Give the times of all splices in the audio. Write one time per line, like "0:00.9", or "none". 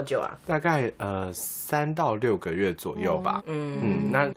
0:03.4